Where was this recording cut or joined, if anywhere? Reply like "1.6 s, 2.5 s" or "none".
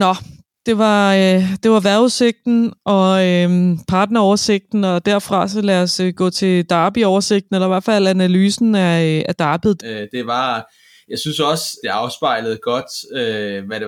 9.8 s, 11.8 s